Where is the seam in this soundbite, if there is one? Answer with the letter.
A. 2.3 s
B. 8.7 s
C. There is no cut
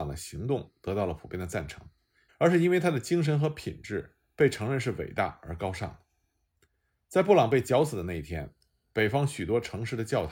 A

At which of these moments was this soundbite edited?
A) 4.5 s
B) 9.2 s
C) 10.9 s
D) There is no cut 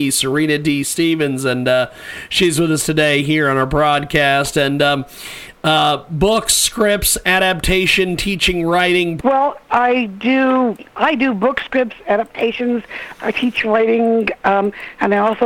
B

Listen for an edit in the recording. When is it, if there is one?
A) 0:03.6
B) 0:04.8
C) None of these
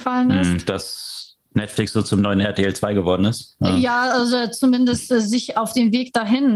C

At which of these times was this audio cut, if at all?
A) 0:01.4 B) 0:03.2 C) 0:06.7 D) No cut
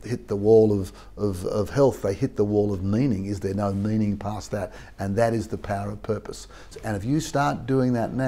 C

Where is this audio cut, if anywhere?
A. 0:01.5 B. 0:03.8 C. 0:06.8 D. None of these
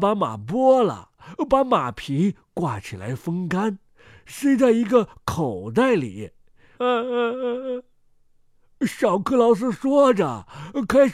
C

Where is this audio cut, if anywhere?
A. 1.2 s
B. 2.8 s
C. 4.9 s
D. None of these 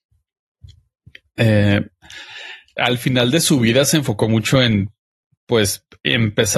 B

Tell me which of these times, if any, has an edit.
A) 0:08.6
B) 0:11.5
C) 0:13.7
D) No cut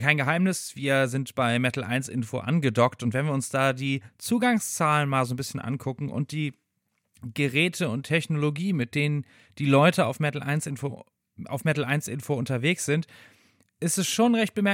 D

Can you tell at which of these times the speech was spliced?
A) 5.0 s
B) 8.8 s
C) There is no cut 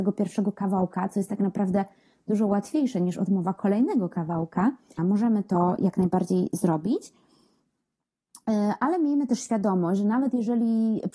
A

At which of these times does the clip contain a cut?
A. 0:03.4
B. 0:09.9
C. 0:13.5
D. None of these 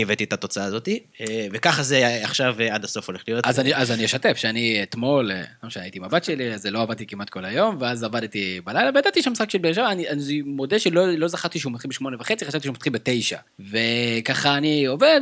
C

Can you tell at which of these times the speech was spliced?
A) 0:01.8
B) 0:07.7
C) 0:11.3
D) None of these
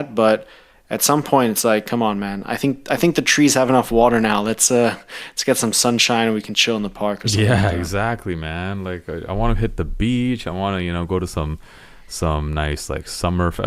D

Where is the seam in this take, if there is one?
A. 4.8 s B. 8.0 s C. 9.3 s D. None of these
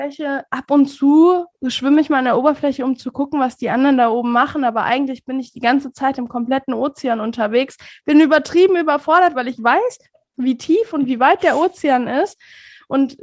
C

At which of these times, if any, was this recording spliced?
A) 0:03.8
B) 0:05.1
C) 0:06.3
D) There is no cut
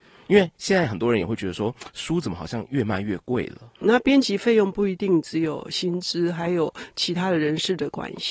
A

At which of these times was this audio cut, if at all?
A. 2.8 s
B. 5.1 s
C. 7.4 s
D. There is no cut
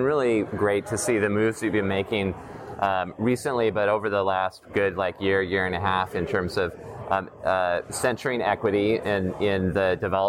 D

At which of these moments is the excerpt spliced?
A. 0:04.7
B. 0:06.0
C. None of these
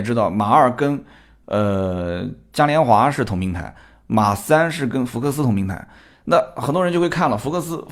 C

